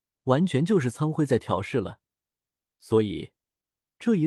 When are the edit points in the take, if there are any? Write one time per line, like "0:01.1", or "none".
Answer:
none